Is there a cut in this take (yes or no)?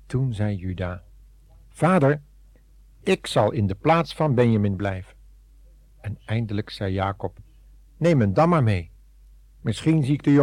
no